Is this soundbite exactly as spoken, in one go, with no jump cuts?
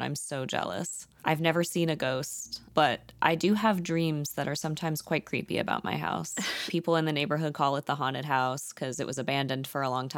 no; 1 cut; at 6.7 s

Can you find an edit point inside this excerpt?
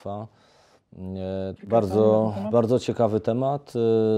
yes; 1 cut; at 1.6 s

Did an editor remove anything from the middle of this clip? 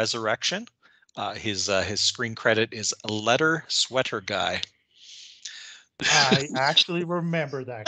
no; 0 cuts

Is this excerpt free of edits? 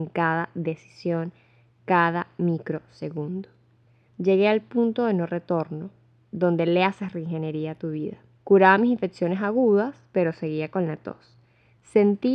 no; 2 cuts; at 4.1 s, 8.4 s

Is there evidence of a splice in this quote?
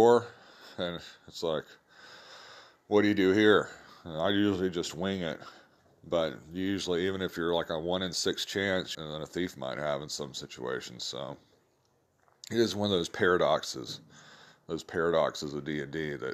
yes; 1 cut; at 8.9 s

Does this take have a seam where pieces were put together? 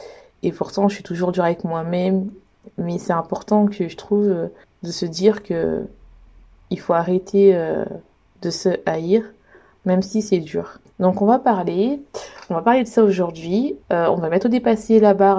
yes; 1 cut; at 13.8 s

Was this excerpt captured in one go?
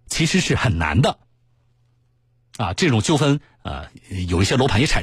yes; 0 cuts

